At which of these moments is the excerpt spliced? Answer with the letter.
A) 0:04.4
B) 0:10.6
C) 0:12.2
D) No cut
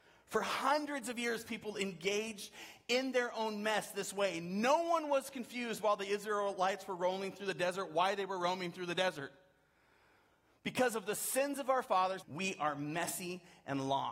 C